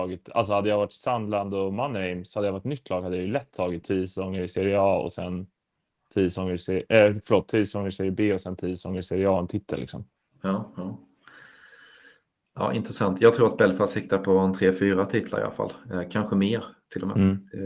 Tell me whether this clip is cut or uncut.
uncut